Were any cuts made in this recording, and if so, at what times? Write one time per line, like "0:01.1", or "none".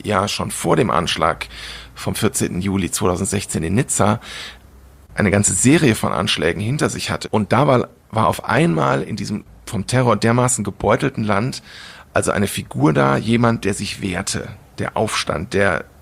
0:07.2